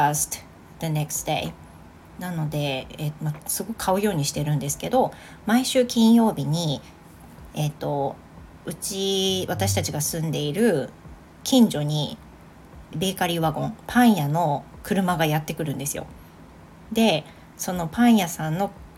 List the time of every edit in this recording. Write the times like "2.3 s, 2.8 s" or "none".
3.2 s, 12.9 s